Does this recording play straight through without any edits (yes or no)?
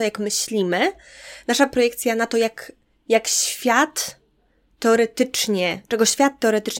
yes